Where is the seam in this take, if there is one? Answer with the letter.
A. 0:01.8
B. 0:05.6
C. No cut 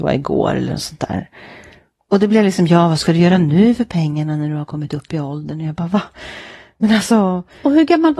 C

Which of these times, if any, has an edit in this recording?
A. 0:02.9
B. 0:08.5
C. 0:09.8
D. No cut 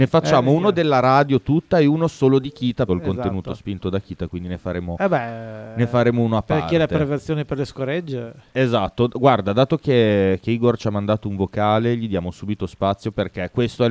A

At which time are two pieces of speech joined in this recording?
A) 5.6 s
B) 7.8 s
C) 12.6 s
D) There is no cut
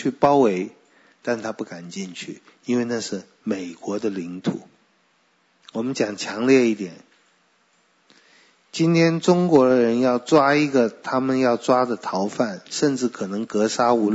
A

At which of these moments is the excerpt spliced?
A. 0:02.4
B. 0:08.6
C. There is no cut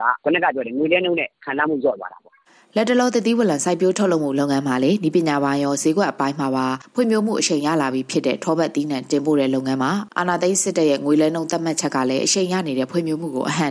C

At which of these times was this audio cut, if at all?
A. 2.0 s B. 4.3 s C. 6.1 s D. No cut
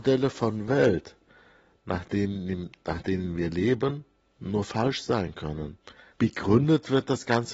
C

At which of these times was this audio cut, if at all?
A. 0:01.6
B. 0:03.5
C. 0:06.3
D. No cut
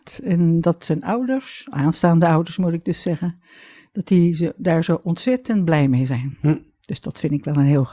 D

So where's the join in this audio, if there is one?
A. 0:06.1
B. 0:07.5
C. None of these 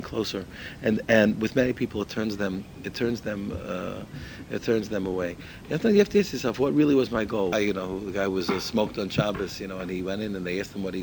B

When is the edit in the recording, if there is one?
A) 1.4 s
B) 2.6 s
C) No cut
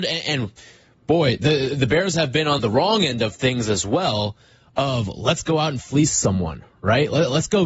B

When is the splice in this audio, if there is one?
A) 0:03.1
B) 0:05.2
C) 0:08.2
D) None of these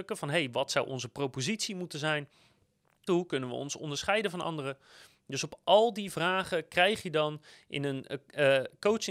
A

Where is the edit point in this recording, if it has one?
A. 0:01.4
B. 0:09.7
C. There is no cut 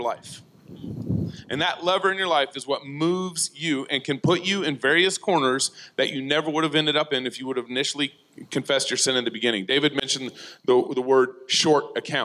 C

